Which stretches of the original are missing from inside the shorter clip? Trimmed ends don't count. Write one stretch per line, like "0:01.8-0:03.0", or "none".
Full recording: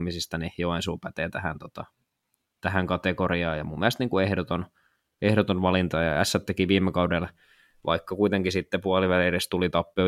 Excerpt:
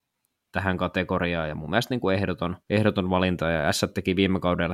0:04.7-0:05.1